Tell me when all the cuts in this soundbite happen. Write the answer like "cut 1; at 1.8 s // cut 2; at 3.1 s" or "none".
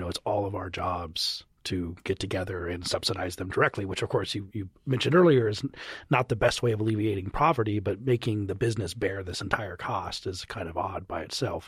cut 1; at 4.5 s